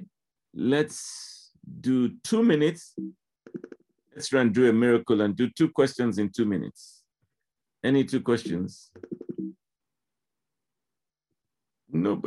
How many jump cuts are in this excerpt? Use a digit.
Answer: 0